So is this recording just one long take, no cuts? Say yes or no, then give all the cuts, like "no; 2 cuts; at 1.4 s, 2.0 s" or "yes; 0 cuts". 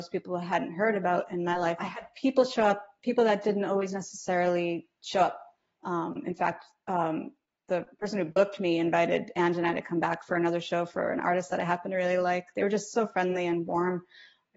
no; 2 cuts; at 1.8 s, 5.8 s